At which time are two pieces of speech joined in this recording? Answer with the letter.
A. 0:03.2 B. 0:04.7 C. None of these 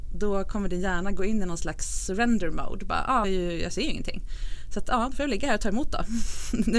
A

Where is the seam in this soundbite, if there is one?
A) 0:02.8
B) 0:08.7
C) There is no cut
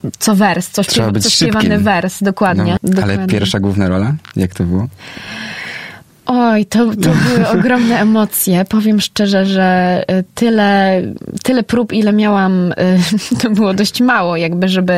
A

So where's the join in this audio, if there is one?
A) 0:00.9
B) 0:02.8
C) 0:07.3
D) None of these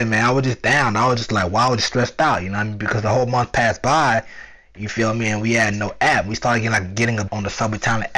C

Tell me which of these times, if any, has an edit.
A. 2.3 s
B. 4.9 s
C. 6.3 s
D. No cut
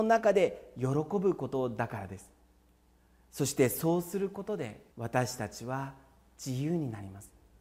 B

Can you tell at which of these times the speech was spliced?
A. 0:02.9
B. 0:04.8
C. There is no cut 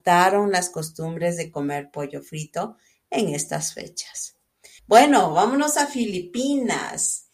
B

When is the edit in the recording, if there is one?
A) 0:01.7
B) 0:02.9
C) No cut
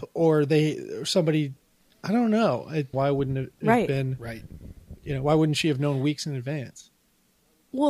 B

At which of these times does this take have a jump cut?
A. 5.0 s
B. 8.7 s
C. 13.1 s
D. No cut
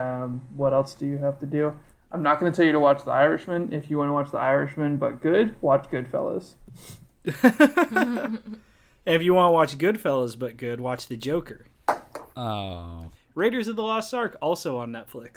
C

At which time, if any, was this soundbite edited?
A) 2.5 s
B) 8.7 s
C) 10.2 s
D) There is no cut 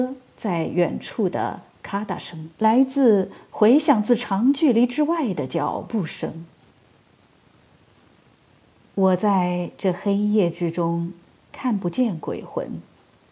A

